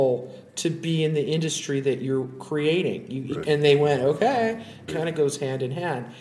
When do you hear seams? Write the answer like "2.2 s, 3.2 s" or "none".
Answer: 3.4 s, 4.9 s